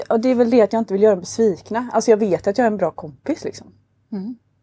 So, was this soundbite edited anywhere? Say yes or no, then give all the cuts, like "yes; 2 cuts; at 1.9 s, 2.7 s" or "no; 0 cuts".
no; 0 cuts